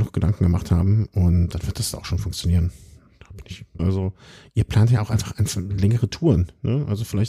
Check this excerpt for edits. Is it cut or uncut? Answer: cut